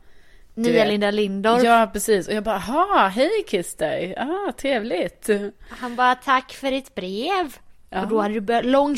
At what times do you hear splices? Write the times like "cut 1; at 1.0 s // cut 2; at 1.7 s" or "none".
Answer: none